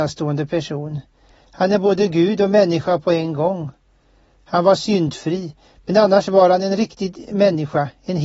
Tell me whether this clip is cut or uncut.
uncut